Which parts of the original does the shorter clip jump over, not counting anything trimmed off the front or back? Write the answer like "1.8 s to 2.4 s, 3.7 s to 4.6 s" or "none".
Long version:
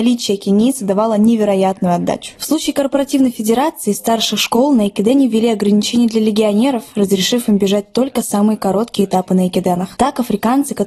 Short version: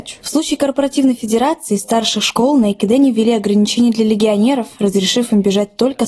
none